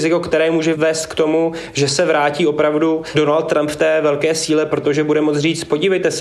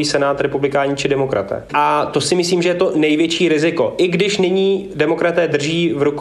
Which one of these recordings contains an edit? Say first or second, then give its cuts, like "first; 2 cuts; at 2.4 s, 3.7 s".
second; 1 cut; at 1.7 s